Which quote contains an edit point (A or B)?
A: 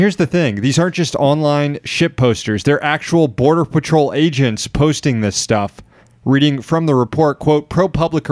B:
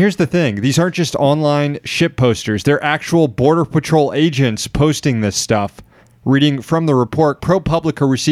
B